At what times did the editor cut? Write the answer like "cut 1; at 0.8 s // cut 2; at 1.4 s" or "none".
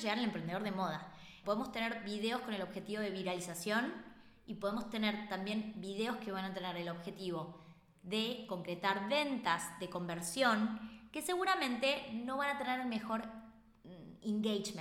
cut 1; at 1.4 s